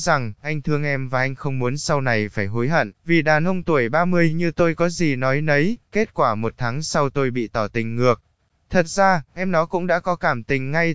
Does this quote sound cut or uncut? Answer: cut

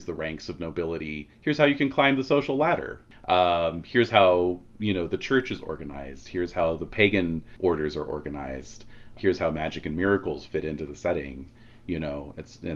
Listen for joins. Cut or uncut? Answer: cut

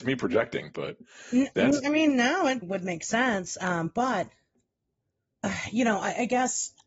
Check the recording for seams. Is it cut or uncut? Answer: cut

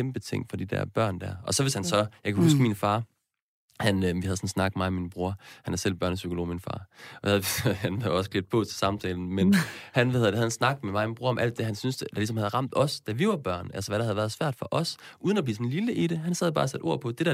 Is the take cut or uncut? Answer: uncut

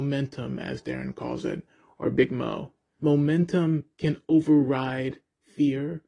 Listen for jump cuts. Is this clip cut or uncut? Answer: cut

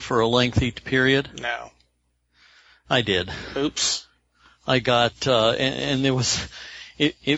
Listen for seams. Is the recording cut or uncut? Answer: uncut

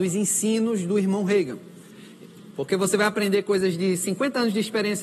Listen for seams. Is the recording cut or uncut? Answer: cut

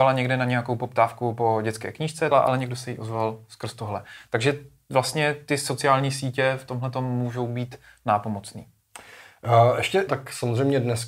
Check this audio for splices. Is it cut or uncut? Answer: cut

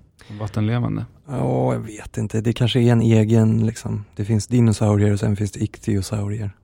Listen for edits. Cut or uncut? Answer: uncut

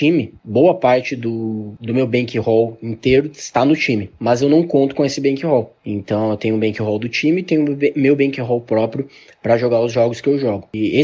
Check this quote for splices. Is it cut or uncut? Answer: uncut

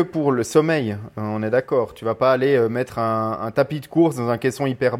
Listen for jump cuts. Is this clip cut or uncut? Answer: uncut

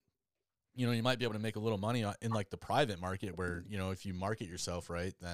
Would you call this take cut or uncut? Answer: uncut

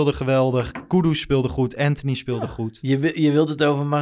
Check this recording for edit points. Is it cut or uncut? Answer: uncut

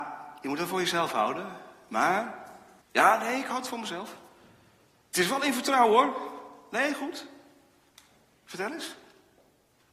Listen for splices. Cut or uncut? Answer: cut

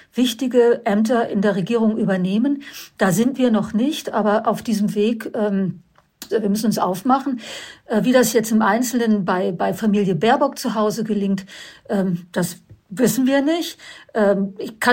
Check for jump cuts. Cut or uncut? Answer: cut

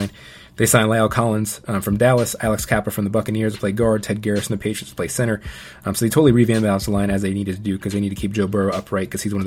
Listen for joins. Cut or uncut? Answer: uncut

